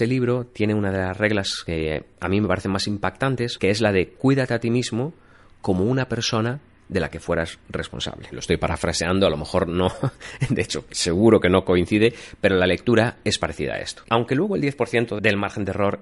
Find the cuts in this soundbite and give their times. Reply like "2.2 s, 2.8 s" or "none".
8.3 s, 14.1 s